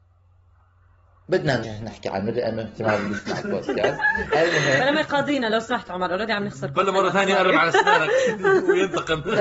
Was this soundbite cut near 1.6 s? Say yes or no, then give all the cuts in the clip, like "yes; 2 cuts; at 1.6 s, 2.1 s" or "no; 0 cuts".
yes; 1 cut; at 1.6 s